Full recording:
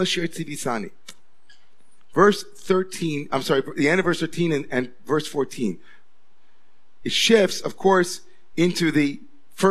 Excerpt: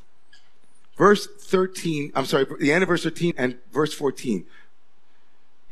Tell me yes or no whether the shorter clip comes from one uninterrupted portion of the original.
no